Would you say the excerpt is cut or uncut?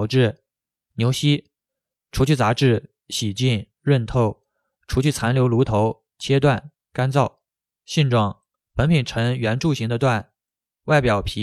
uncut